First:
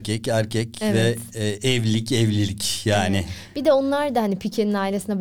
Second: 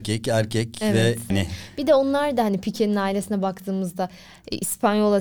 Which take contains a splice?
second; 1 cut; at 1.3 s

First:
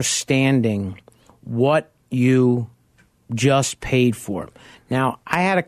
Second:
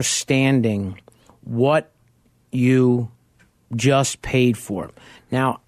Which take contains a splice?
first; 1 cut; at 2.0 s

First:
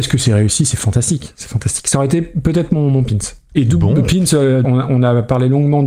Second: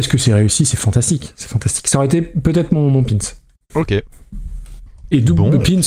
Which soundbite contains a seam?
first; 2 cuts; at 3.5 s, 4.6 s

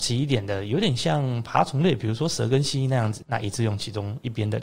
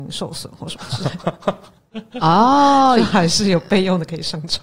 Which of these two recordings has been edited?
first; 1 cut; at 3.2 s

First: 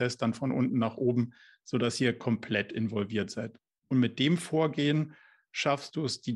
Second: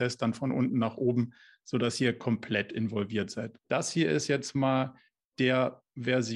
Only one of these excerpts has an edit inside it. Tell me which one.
second; 1 cut; at 3.6 s

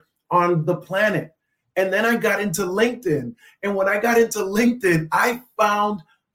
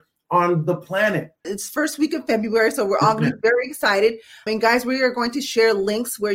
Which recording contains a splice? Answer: second; 1 cut; at 1.4 s

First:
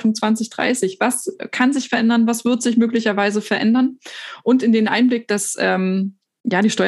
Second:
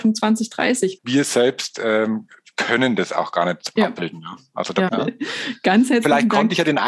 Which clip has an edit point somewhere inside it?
second; 3 cuts; at 1.0 s, 3.8 s, 4.9 s

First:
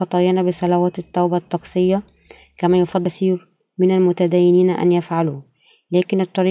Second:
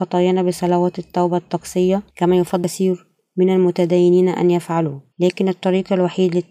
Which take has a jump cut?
second; 2 cuts; at 2.1 s, 5.1 s

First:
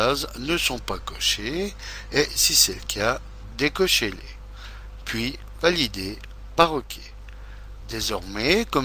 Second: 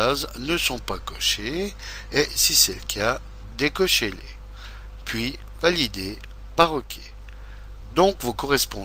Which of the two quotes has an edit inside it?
second; 1 cut; at 7.9 s

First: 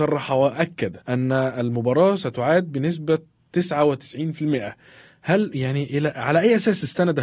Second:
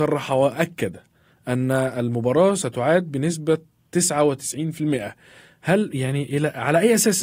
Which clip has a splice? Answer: first; 1 cut; at 1.0 s

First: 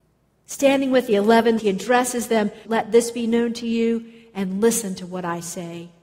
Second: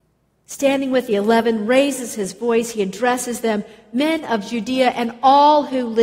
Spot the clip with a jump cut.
first; 2 cuts; at 1.6 s, 2.6 s

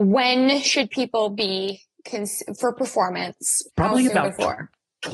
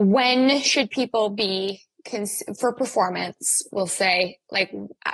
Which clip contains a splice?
first; 1 cut; at 3.7 s

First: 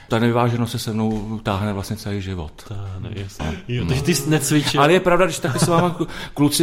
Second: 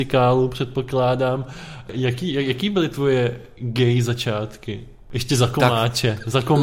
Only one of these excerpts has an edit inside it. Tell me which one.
first; 1 cut; at 3.4 s

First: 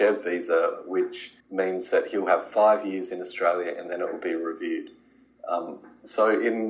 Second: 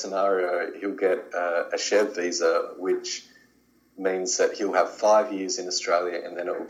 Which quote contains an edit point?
first; 1 cut; at 1.4 s

